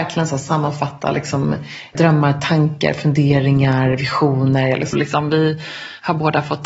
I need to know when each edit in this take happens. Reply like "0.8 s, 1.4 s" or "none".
1.9 s, 4.9 s